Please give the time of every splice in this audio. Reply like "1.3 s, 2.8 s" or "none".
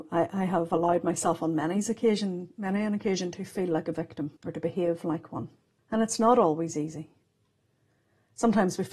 4.4 s, 5.8 s